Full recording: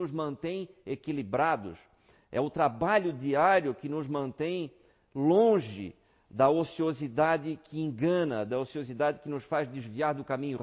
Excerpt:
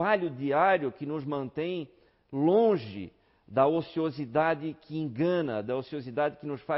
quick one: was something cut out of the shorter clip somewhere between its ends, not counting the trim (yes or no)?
no